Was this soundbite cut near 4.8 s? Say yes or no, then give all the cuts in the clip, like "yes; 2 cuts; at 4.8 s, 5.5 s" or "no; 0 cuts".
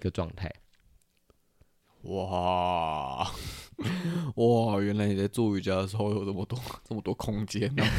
no; 1 cut; at 1.8 s